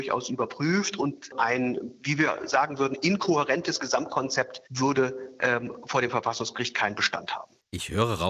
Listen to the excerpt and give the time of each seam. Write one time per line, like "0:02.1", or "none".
0:04.7